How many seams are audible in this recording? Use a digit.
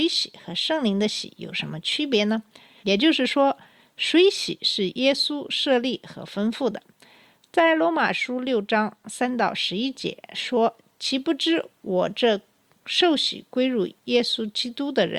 1